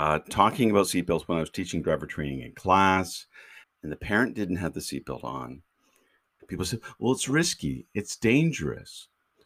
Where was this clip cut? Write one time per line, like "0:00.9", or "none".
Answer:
0:03.6
0:06.4